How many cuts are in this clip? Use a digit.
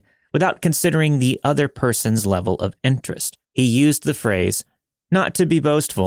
1